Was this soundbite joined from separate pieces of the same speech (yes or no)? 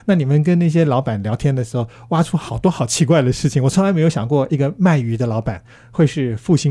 no